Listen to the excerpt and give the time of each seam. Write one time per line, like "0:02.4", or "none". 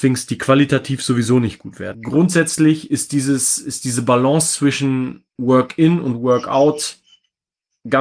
0:01.9
0:05.3

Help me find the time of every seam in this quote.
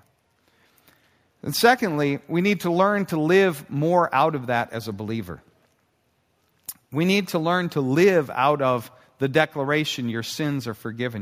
none

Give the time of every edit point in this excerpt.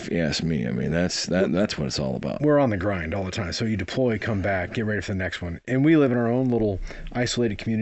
none

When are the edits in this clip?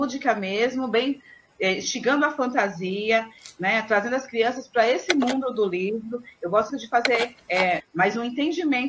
0:06.7
0:07.8

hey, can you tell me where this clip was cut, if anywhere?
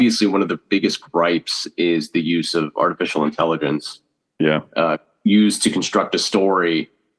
none

